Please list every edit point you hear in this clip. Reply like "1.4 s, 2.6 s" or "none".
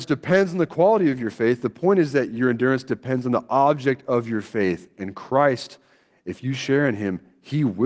6.1 s